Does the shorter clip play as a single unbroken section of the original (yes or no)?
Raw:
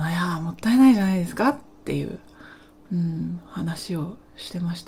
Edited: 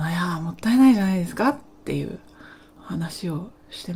no